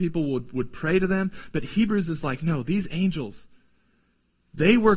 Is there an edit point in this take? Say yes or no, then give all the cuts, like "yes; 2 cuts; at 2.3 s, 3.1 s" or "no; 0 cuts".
no; 0 cuts